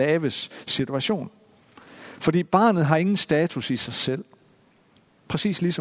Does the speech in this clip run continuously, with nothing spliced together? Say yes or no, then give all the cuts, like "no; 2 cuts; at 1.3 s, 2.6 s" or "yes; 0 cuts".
yes; 0 cuts